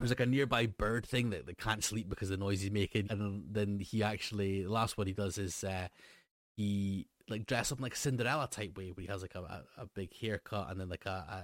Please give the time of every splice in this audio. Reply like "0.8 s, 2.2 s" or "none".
3.0 s